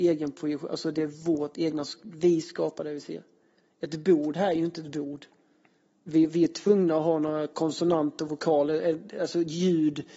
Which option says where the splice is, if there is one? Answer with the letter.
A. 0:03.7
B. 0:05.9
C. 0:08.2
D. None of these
D